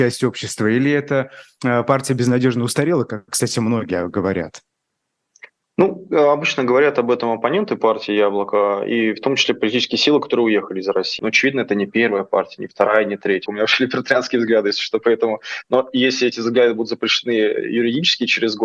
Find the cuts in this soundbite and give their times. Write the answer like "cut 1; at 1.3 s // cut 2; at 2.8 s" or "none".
cut 1; at 11.2 s // cut 2; at 13.5 s

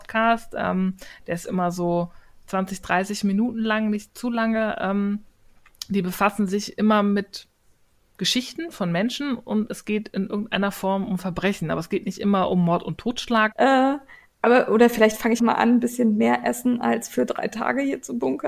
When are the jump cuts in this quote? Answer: cut 1; at 13.5 s // cut 2; at 15.4 s

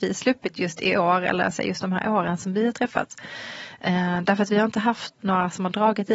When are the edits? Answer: cut 1; at 5.2 s

